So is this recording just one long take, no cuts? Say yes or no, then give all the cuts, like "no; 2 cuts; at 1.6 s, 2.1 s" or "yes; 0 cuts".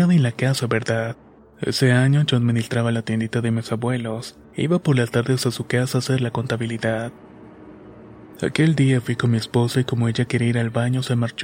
no; 1 cut; at 1.4 s